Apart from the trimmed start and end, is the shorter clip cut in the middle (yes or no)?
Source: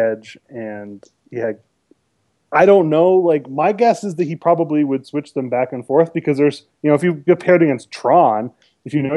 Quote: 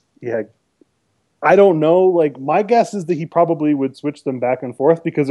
no